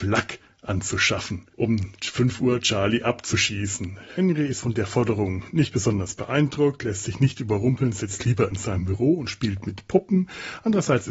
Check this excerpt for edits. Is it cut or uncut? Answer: uncut